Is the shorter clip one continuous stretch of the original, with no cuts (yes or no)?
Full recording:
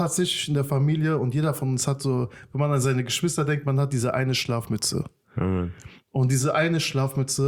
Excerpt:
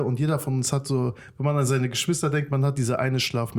yes